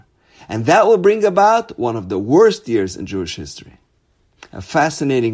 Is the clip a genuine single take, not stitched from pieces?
yes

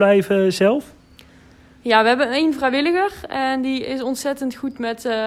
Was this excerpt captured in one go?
yes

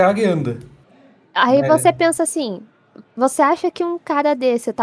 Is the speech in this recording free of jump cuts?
yes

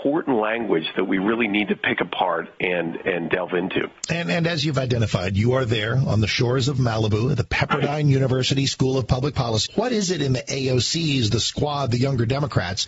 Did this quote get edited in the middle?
yes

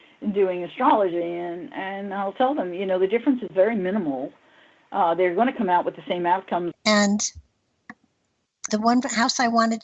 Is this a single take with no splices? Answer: no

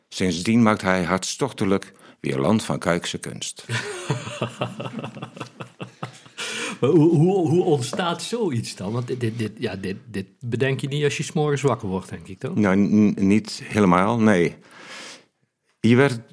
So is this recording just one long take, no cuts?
yes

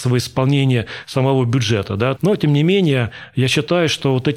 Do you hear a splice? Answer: yes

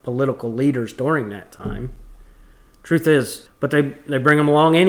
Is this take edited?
yes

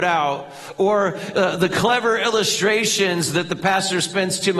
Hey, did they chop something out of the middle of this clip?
no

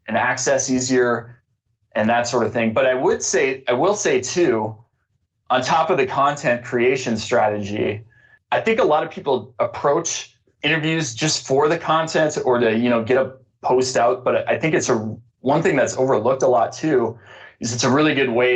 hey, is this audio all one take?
yes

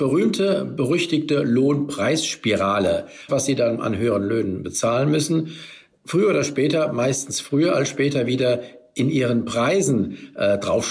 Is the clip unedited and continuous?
no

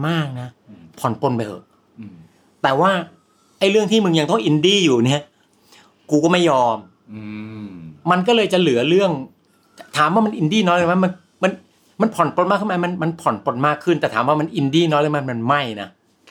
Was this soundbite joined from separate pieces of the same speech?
no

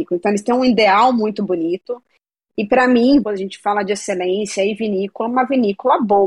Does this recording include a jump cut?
yes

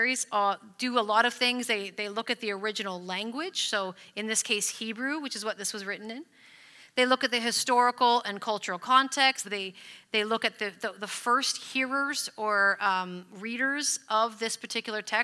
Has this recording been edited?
yes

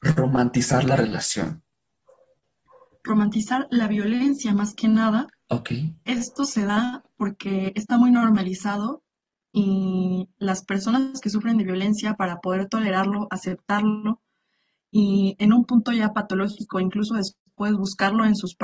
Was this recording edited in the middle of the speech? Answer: no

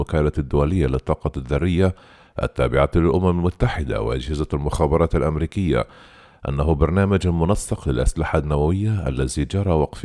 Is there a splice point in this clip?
no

